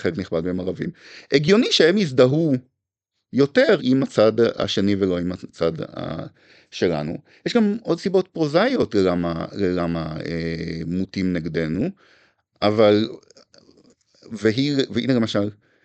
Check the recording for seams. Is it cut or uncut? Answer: cut